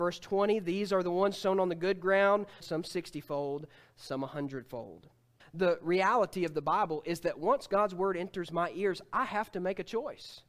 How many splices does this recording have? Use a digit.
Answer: 2